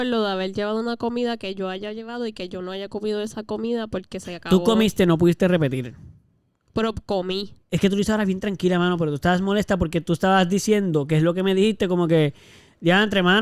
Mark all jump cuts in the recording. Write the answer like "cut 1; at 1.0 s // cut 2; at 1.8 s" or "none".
cut 1; at 7.6 s